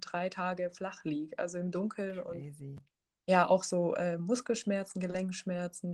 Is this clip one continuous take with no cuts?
yes; 0 cuts

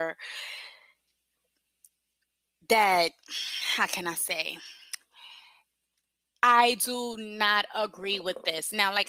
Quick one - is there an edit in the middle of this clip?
no; 0 cuts

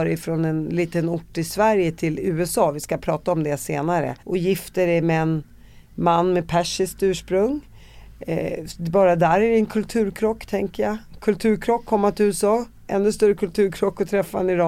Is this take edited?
yes; 1 cut; at 4.2 s

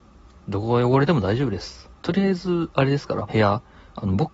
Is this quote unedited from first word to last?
no; 2 cuts; at 2.0 s, 3.3 s

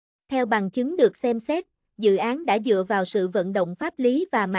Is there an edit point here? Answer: no; 0 cuts

